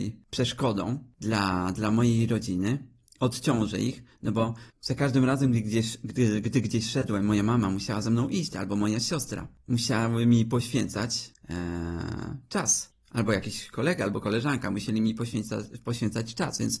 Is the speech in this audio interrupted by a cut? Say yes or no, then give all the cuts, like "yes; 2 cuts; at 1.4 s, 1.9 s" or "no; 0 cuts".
no; 0 cuts